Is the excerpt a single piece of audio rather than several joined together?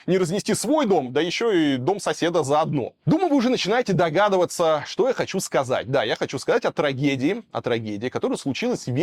yes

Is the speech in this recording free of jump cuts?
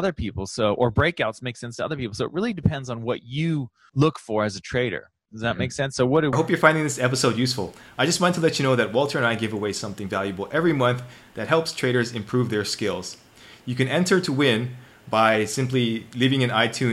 no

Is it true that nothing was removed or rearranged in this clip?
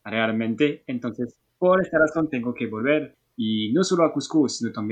yes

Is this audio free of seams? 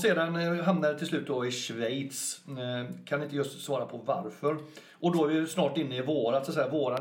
yes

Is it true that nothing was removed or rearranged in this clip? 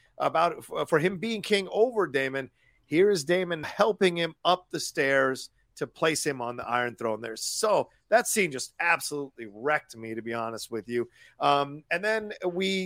no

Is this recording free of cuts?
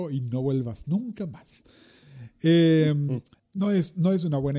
no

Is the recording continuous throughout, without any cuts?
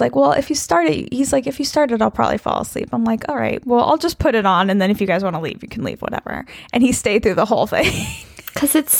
yes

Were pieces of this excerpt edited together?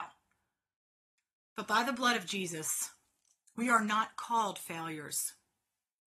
no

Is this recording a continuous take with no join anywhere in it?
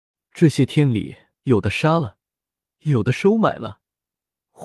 no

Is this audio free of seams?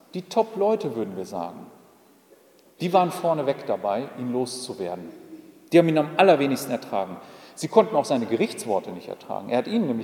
yes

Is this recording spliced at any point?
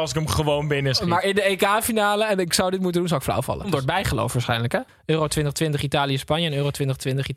yes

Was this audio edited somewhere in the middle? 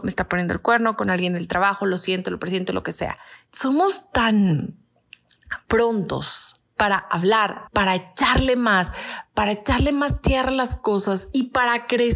yes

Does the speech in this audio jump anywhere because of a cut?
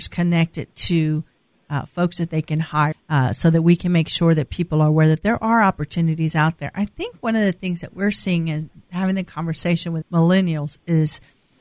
yes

